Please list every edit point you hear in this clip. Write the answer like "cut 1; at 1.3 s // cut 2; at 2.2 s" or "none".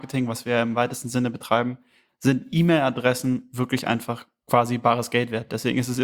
none